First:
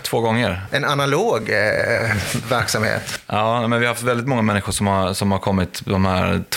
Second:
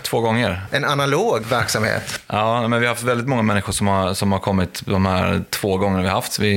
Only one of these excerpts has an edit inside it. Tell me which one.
second; 1 cut; at 1.4 s

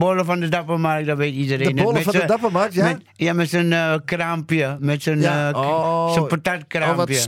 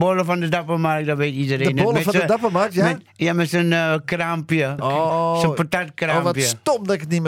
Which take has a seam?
second; 1 cut; at 4.8 s

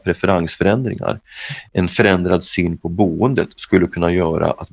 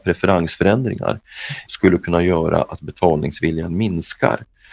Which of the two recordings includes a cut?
second; 1 cut; at 1.7 s

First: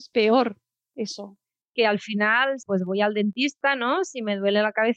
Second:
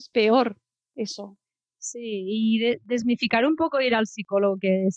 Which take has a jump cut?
first; 2 cuts; at 1.6 s, 2.6 s

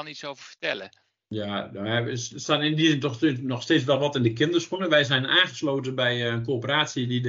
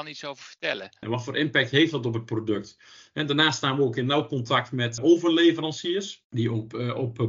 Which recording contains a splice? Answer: second; 2 cuts; at 1.0 s, 5.0 s

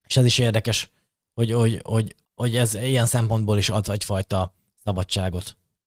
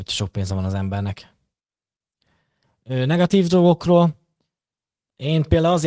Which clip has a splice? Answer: first; 1 cut; at 2.3 s

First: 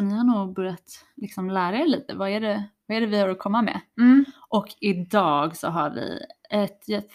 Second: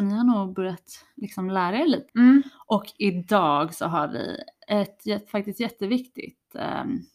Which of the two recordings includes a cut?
second; 1 cut; at 2.1 s

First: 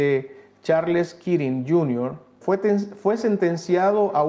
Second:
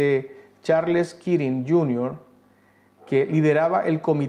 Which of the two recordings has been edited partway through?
first; 1 cut; at 2.4 s

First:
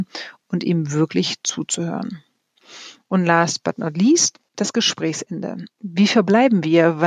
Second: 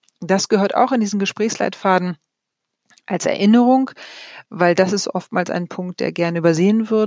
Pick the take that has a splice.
first; 1 cut; at 4.5 s

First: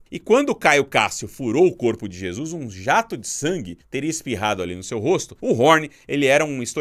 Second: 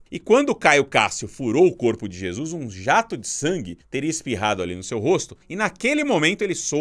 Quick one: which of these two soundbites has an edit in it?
first; 1 cut; at 5.4 s

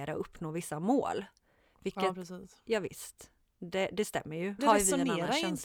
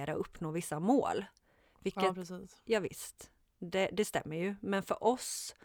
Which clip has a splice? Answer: first; 1 cut; at 4.6 s

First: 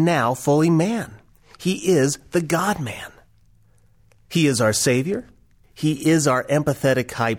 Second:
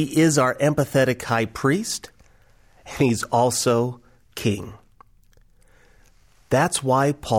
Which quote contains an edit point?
first; 1 cut; at 5.6 s

